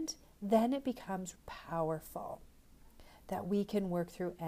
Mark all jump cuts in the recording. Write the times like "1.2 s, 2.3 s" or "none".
1.3 s